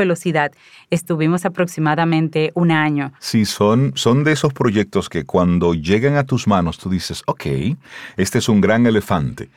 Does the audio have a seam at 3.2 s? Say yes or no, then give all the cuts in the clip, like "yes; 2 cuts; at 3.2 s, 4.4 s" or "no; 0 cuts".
yes; 1 cut; at 3.2 s